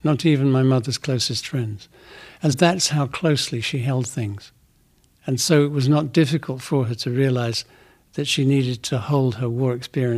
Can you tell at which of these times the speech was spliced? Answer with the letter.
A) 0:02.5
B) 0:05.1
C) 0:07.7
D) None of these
A